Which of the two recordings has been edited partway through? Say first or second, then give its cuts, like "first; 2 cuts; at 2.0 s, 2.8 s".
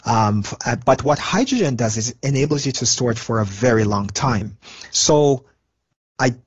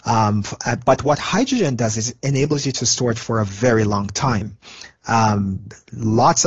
first; 1 cut; at 4.9 s